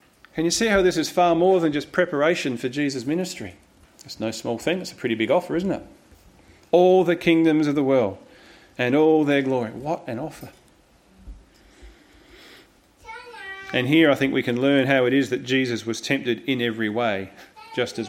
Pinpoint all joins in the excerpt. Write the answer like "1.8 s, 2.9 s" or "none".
3.8 s